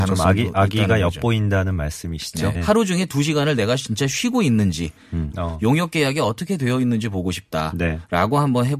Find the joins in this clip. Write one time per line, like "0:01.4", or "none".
0:02.5
0:05.3